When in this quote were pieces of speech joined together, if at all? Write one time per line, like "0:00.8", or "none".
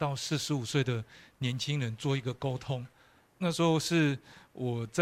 none